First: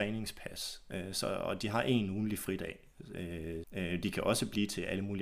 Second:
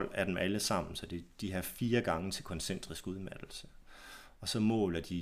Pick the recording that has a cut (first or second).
first